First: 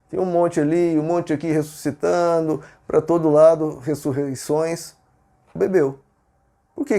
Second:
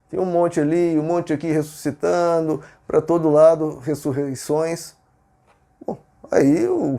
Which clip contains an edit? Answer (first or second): first